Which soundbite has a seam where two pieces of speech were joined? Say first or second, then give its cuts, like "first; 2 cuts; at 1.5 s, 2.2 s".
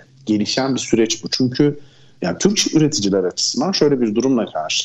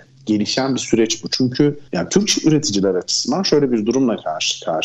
second; 1 cut; at 1.9 s